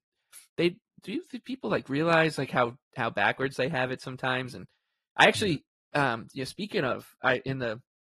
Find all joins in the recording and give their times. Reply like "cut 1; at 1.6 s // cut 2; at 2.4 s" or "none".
none